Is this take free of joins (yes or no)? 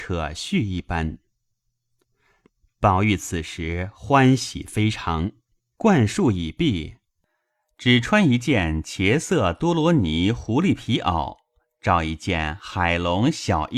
no